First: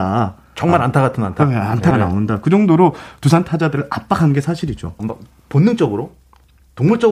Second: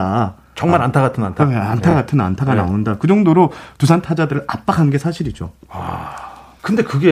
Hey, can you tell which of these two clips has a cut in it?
first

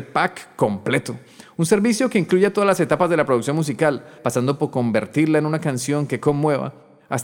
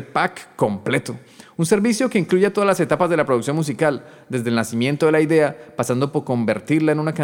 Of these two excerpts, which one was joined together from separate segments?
first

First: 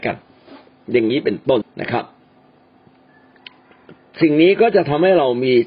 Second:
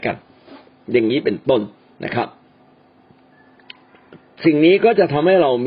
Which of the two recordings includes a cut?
first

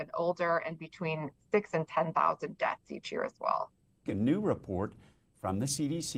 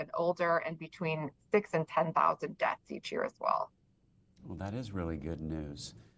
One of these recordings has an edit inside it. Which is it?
first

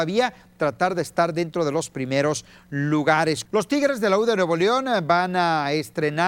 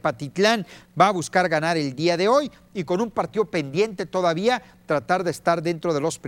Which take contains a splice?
first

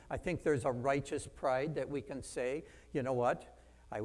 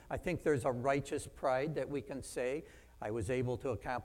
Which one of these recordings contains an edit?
second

